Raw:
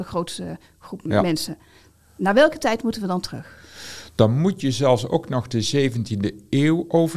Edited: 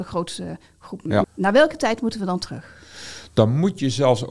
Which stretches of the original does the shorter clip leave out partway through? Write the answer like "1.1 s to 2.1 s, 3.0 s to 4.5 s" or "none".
1.2 s to 2.1 s